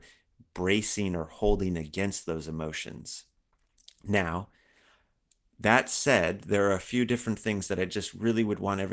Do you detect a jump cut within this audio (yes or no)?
no